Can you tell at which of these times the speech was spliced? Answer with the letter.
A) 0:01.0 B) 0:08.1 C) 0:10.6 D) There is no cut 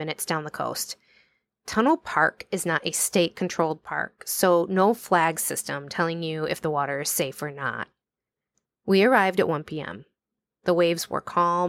D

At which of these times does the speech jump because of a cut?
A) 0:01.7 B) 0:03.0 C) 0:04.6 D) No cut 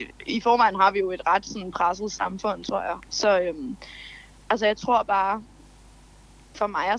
D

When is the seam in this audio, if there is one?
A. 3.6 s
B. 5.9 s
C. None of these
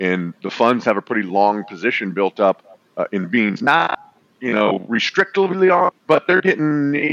B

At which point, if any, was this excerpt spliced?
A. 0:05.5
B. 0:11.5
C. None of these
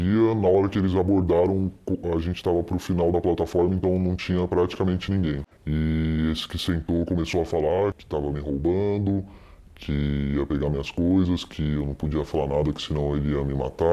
A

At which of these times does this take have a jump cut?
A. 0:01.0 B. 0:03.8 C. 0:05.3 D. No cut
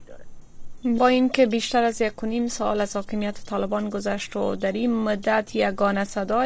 A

